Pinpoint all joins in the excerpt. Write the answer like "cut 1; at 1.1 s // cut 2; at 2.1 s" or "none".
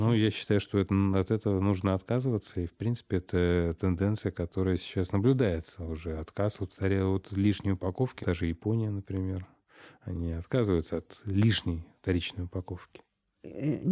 cut 1; at 8.2 s